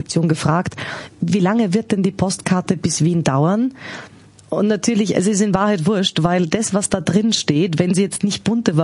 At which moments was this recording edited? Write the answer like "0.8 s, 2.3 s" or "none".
none

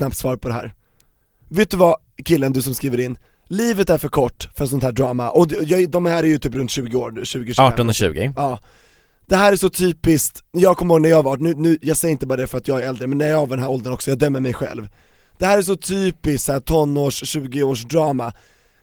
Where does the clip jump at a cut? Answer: none

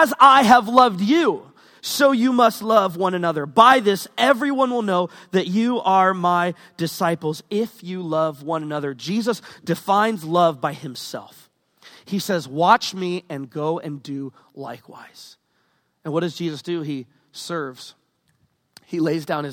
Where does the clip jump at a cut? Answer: none

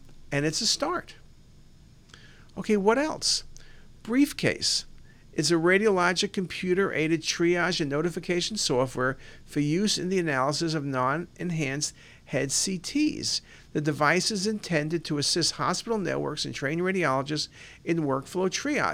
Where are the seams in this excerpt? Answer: none

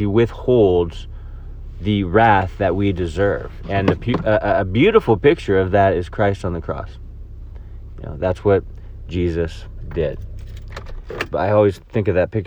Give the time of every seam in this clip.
11.3 s

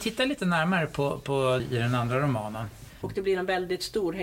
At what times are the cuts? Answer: 1.6 s, 3.0 s

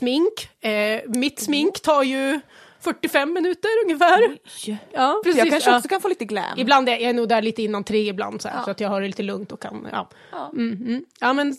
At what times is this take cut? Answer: 5.2 s

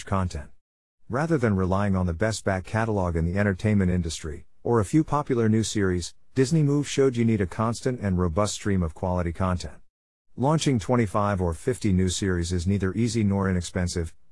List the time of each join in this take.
none

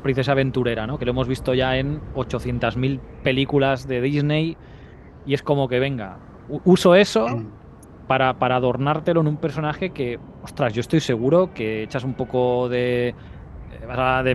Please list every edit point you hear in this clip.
none

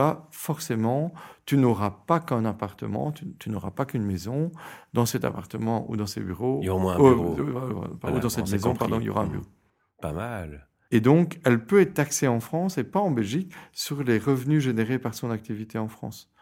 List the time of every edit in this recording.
10.9 s

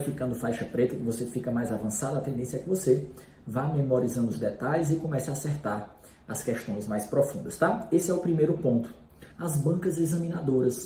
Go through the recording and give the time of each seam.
9.3 s

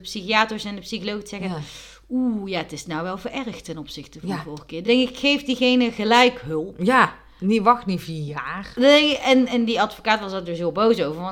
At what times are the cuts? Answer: none

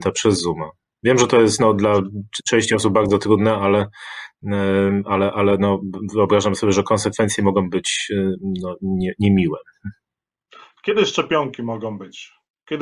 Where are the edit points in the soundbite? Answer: none

